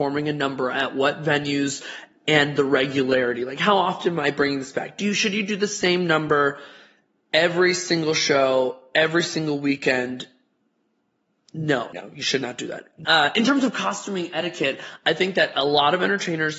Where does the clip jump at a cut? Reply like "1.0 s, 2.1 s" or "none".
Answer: 11.9 s, 13.0 s